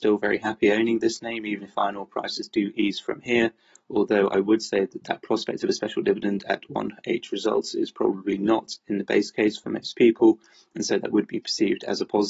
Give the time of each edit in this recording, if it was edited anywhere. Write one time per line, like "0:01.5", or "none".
none

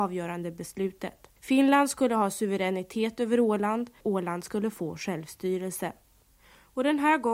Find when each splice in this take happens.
0:01.4
0:04.0

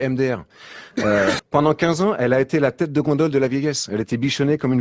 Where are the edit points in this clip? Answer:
0:01.4

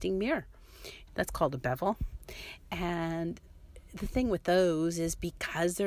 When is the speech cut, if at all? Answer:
0:01.1

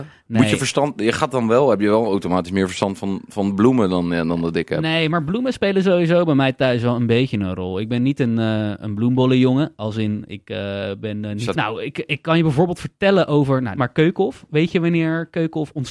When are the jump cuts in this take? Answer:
0:11.5
0:13.8

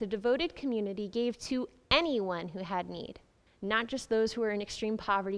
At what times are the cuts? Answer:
0:03.5

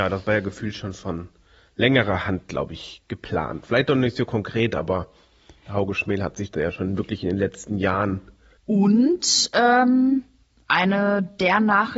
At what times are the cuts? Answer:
0:08.6

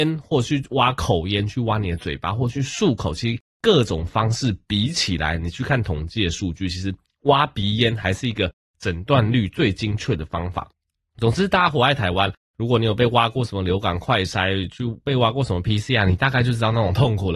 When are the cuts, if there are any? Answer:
none

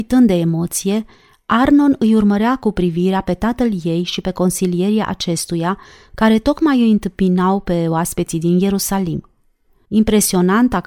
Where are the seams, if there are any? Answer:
0:09.8

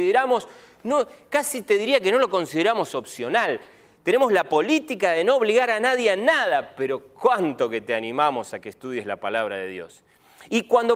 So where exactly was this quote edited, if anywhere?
none

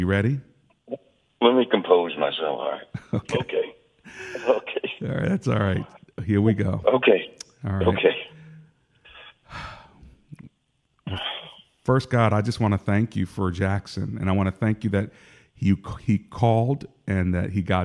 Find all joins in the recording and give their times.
none

